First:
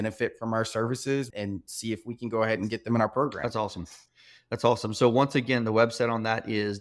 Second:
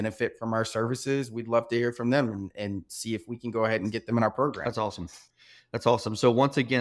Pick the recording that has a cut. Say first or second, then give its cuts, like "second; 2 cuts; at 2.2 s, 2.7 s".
first; 1 cut; at 1.3 s